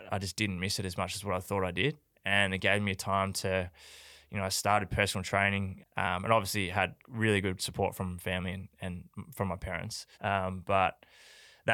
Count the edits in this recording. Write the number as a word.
two